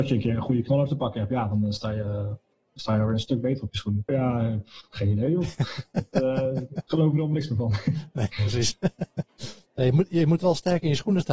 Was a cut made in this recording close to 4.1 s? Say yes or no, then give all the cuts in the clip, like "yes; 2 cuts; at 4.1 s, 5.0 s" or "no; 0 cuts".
yes; 2 cuts; at 4.1 s, 9.7 s